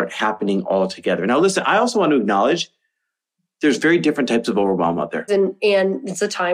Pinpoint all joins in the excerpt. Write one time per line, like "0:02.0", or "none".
0:05.3